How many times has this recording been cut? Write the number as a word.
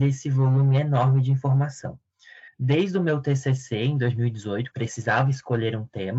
two